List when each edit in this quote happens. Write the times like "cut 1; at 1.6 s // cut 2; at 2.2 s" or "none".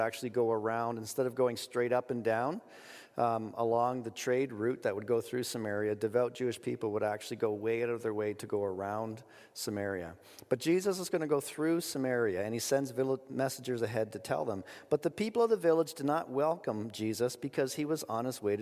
none